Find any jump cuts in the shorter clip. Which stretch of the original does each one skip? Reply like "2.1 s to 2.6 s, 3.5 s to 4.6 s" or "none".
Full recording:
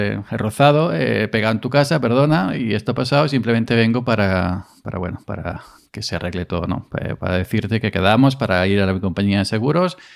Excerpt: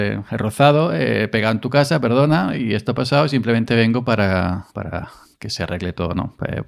4.7 s to 5.2 s